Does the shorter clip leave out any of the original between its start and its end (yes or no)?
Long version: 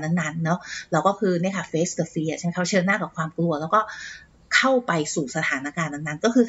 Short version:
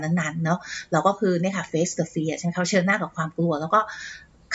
no